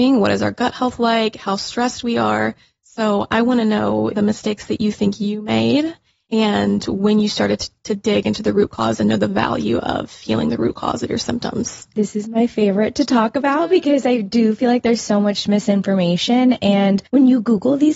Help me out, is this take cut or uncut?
cut